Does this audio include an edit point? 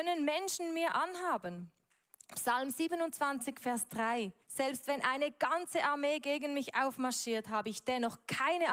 yes; 1 cut; at 4.4 s

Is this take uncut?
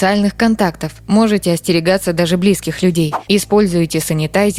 no; 1 cut; at 3.3 s

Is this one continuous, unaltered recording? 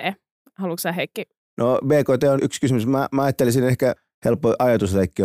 no; 1 cut; at 2.4 s

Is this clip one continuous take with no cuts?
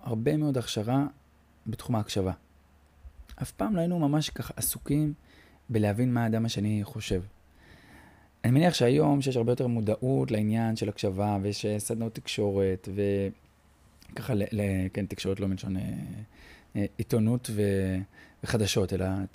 yes; 0 cuts

